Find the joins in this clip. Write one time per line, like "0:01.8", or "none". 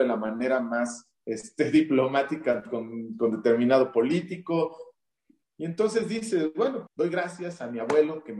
0:05.4
0:06.9